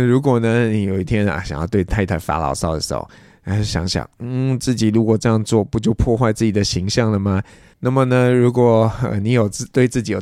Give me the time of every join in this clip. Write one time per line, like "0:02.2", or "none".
0:07.7